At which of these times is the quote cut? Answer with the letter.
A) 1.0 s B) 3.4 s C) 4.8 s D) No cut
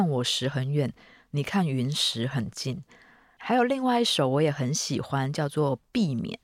B